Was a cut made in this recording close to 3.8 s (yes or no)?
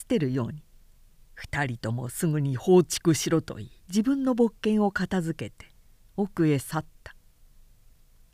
yes